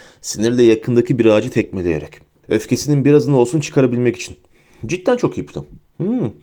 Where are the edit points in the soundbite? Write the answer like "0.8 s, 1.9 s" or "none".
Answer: 2.4 s